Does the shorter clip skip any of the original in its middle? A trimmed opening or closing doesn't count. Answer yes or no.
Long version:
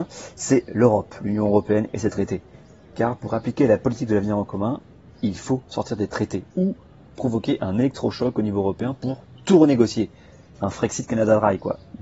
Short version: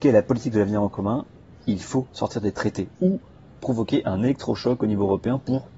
no